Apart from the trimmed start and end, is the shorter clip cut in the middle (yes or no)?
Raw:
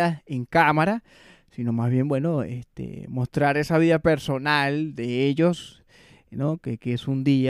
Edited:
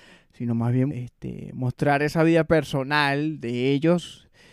yes